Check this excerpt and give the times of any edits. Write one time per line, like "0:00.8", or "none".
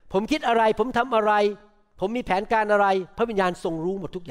none